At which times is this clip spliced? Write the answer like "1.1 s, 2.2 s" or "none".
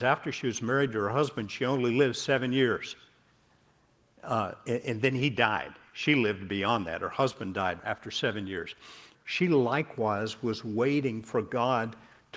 7.8 s, 9.1 s